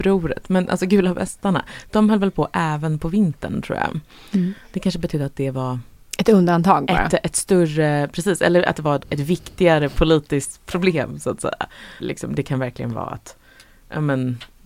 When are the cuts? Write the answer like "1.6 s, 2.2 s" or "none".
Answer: 9.0 s, 12.0 s